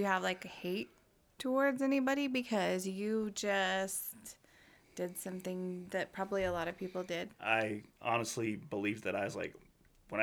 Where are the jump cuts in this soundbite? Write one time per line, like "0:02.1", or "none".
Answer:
0:07.3